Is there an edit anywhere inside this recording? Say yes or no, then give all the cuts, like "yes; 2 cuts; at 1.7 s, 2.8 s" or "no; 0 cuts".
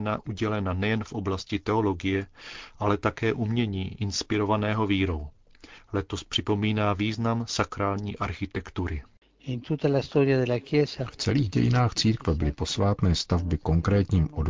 no; 0 cuts